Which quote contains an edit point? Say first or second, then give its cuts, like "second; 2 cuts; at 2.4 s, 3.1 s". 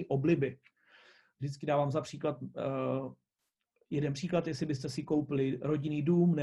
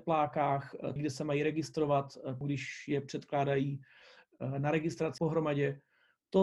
second; 3 cuts; at 1.0 s, 2.4 s, 5.2 s